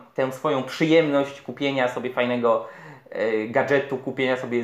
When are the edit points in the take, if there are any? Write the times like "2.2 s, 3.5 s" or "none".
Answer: none